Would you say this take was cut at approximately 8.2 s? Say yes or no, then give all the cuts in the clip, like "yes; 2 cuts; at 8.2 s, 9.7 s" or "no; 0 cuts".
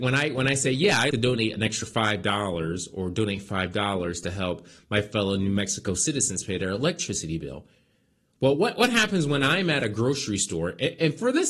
no; 1 cut; at 1.1 s